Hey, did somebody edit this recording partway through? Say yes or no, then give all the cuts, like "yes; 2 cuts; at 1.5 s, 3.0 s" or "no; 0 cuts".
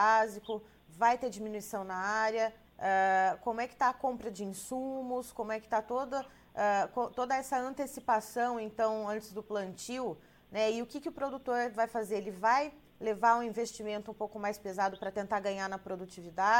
yes; 1 cut; at 2.6 s